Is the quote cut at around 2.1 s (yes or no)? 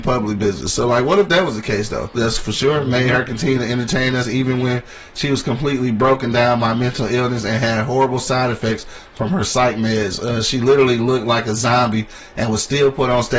yes